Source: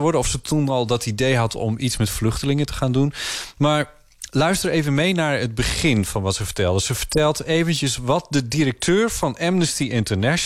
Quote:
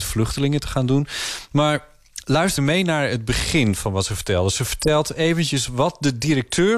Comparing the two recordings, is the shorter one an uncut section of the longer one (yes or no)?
no